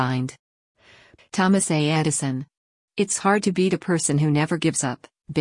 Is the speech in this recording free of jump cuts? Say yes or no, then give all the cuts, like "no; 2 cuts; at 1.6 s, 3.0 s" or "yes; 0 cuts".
no; 1 cut; at 1.2 s